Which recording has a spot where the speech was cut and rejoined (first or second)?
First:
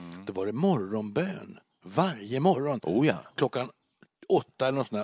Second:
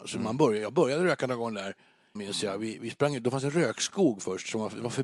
second